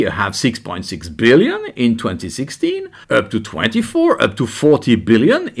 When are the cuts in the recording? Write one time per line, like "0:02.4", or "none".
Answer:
0:03.0